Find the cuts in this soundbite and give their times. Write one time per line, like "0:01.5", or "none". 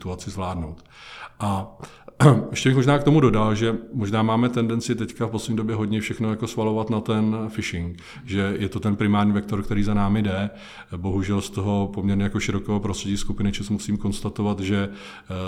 none